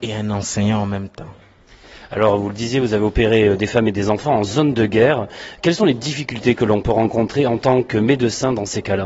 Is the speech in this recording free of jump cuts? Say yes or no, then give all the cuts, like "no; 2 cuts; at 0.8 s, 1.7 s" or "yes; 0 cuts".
yes; 0 cuts